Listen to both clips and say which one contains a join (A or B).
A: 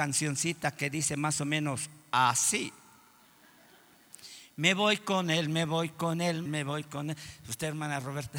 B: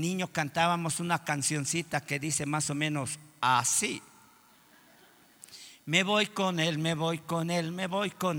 A